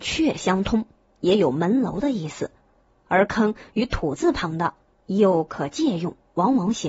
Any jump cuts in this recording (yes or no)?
no